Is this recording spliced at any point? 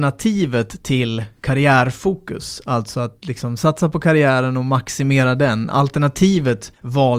no; 0 cuts

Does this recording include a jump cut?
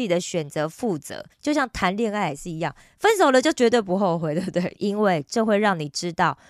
yes; 2 cuts; at 1.3 s, 4.7 s

